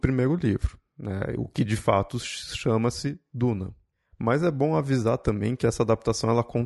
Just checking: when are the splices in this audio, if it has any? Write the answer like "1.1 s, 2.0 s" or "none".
none

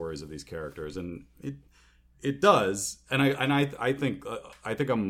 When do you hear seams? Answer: none

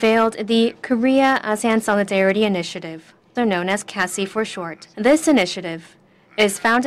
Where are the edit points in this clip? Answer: 3.4 s, 4.9 s

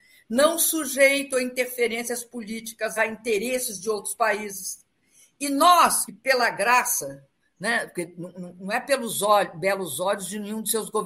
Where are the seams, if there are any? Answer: 3.0 s, 6.1 s

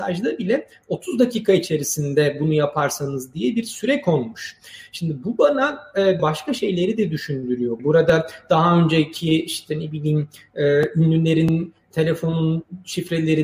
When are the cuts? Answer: 6.2 s, 7.8 s

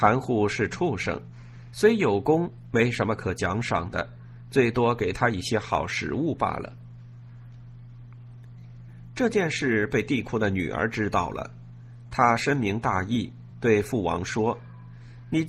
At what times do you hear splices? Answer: none

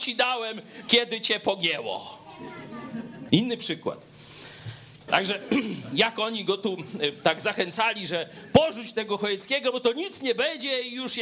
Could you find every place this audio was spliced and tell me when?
3.3 s, 5.1 s

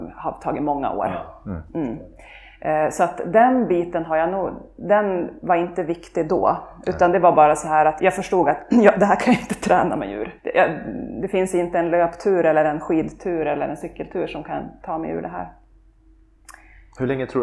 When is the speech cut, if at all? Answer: 8.0 s, 10.4 s

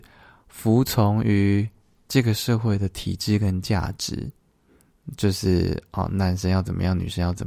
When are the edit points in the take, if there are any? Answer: none

